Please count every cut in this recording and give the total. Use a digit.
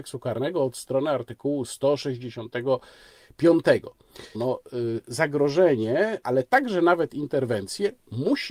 2